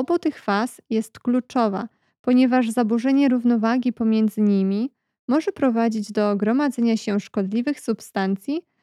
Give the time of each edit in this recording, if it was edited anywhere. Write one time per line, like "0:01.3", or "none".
none